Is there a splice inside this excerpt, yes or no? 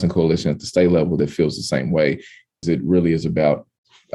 yes